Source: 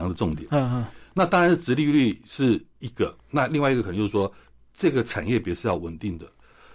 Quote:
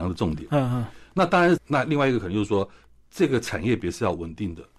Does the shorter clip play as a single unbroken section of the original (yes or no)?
no